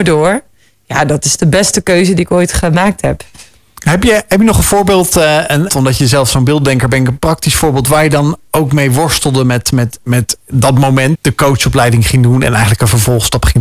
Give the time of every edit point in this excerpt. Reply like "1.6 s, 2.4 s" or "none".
5.7 s, 11.1 s